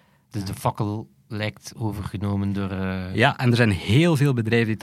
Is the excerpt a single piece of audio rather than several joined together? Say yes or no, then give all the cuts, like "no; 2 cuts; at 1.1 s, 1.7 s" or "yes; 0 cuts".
yes; 0 cuts